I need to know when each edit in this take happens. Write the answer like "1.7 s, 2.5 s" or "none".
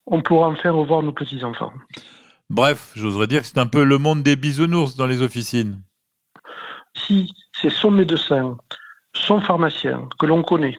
none